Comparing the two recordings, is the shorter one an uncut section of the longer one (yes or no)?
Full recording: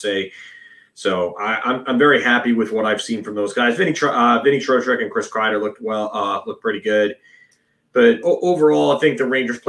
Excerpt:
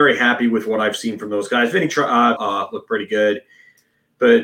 no